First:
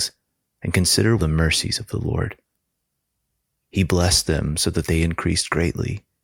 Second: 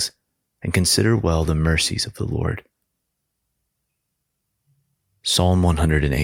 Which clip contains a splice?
first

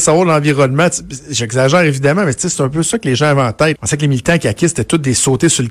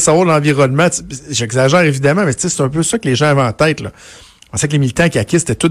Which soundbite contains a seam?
first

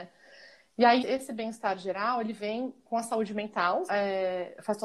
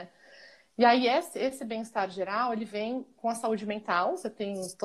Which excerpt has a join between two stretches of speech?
first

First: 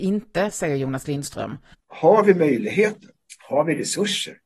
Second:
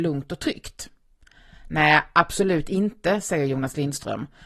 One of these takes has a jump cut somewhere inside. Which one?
first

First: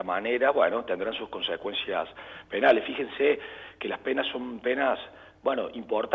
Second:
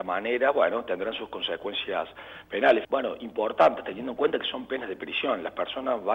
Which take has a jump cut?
second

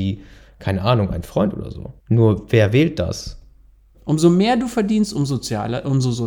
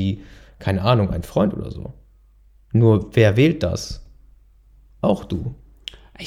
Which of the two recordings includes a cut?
first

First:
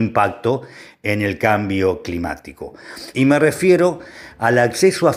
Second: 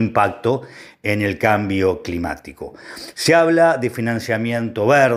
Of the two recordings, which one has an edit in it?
first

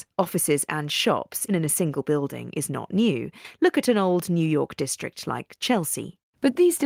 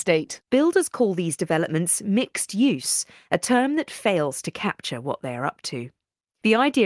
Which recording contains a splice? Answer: first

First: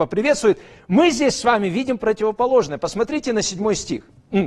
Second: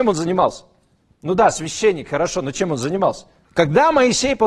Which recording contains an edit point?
second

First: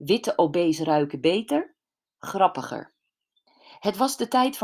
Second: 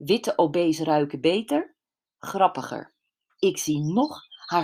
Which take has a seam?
second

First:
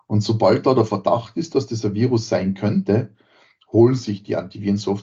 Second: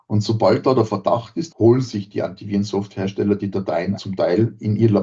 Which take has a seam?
second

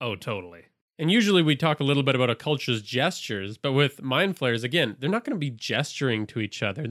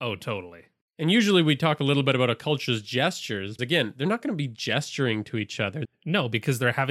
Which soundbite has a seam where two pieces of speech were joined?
second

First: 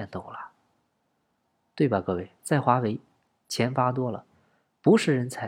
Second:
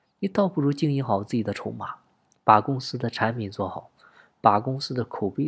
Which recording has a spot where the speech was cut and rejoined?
first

